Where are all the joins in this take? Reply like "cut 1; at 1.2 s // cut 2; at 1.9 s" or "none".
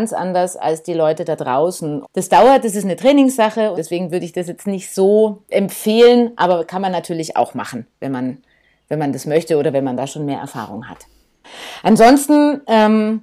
cut 1; at 2.0 s // cut 2; at 3.8 s

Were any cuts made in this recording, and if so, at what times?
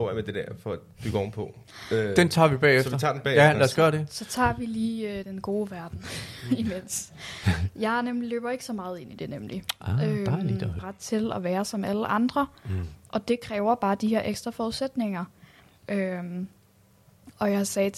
cut 1; at 5.2 s // cut 2; at 10.8 s // cut 3; at 15.8 s

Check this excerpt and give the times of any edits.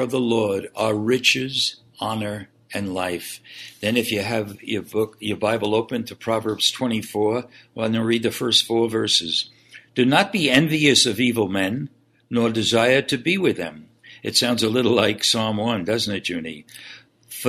none

